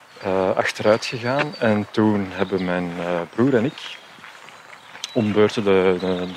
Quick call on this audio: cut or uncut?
uncut